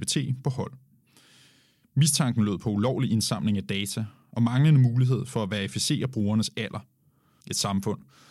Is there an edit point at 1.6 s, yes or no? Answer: no